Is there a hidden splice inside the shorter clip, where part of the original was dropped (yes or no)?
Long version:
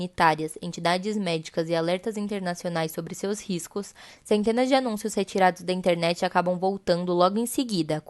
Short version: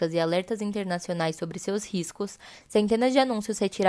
no